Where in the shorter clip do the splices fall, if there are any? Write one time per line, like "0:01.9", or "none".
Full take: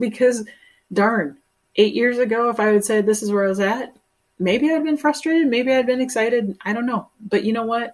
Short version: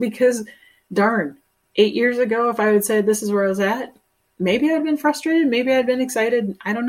none